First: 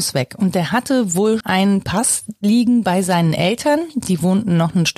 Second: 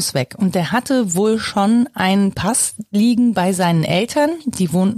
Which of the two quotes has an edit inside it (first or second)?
first